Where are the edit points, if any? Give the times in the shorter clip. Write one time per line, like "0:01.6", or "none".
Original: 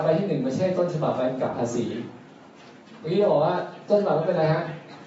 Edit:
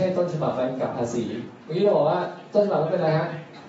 0:01.6